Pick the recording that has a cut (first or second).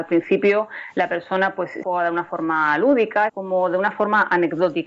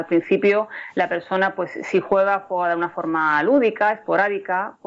first